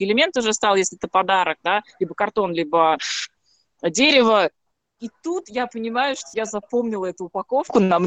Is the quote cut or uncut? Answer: uncut